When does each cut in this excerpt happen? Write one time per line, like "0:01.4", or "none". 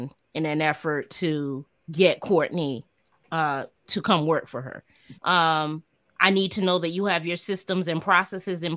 0:05.2